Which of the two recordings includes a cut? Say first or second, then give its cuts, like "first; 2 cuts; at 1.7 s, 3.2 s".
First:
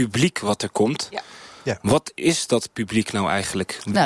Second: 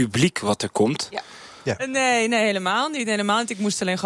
second; 1 cut; at 1.8 s